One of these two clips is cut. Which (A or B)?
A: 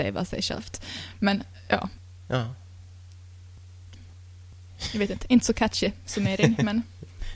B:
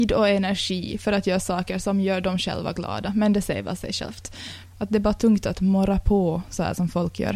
B